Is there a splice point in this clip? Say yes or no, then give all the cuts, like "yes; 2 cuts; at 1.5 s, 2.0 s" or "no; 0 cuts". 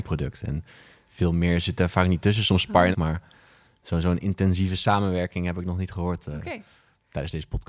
yes; 1 cut; at 2.9 s